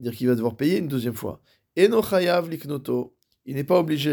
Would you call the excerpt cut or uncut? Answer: uncut